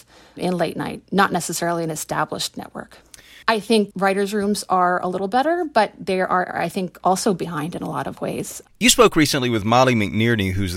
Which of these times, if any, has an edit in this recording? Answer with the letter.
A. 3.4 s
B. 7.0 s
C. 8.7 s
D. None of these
A